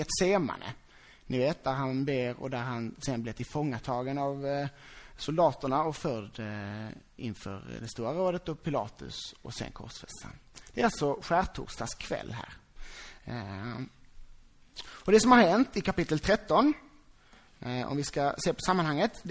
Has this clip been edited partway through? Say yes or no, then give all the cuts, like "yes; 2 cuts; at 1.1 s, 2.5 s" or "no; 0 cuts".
no; 0 cuts